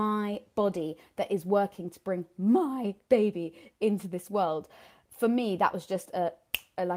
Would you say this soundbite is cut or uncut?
uncut